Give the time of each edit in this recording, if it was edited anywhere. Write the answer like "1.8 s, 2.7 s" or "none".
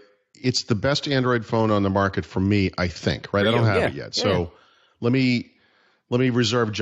none